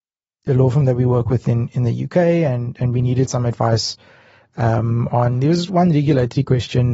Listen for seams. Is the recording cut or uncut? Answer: uncut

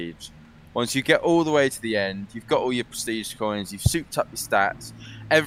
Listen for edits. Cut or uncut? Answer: uncut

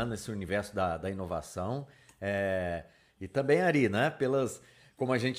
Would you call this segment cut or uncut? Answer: uncut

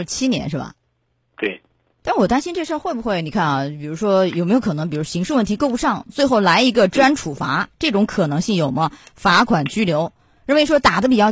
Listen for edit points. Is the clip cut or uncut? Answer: uncut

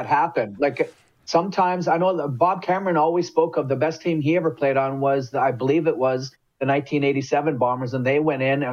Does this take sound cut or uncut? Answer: uncut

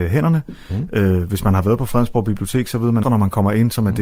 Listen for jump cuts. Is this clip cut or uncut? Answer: cut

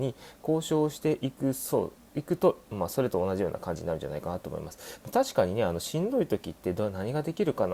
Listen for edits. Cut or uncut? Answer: uncut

